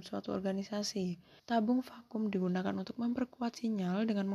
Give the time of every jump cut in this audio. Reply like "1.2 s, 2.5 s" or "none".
1.4 s